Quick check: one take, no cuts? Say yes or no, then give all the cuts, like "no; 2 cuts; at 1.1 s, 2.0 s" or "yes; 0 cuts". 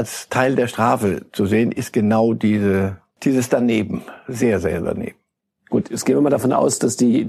yes; 0 cuts